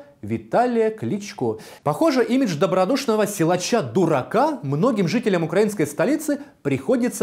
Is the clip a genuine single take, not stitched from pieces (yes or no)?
no